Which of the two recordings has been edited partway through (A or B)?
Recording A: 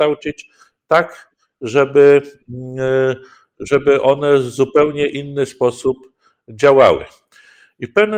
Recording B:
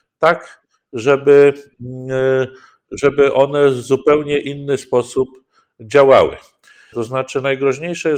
B